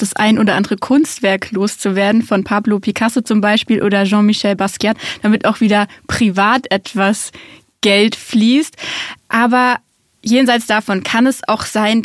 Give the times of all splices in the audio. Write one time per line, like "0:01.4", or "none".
none